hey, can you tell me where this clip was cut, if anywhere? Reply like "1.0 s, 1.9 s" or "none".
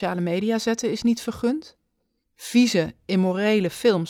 none